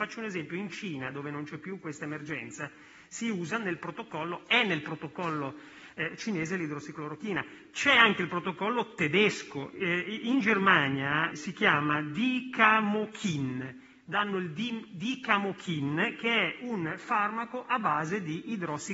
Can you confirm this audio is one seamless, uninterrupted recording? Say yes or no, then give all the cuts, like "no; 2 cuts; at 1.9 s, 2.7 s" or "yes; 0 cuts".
no; 1 cut; at 11.3 s